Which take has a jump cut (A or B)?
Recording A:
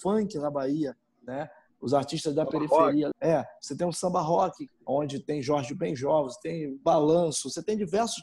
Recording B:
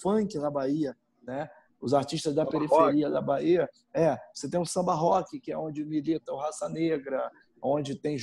A